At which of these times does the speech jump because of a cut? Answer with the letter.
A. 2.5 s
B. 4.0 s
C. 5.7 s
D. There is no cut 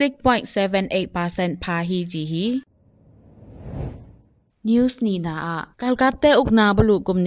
C